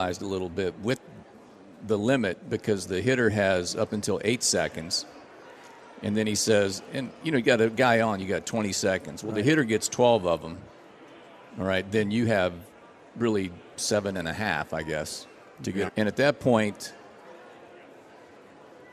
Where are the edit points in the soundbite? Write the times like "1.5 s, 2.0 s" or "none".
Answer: 15.9 s